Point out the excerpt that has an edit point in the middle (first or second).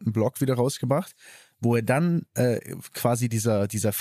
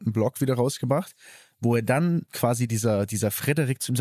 second